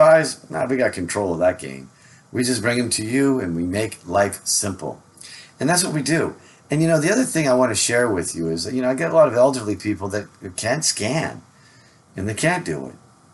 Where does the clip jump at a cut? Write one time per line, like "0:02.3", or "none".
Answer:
none